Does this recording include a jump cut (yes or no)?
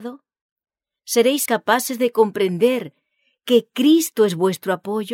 yes